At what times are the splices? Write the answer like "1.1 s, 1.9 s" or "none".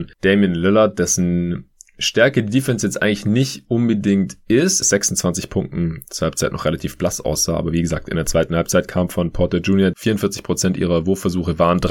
4.8 s, 9.9 s